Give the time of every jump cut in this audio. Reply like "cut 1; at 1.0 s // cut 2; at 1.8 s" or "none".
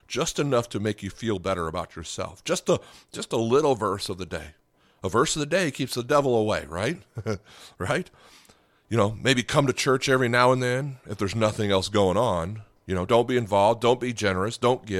cut 1; at 13.1 s